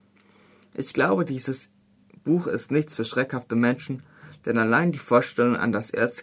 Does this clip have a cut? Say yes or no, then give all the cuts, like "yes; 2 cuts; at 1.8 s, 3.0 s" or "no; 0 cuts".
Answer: no; 0 cuts